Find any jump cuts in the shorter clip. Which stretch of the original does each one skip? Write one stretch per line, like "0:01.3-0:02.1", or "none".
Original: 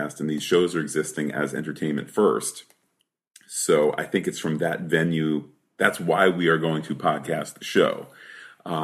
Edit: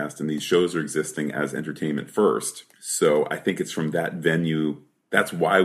0:02.7-0:03.4